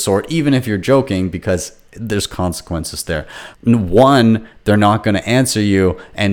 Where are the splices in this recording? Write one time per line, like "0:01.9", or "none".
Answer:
0:03.5